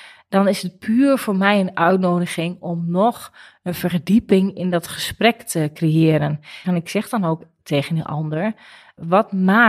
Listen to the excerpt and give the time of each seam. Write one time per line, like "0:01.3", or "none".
0:06.6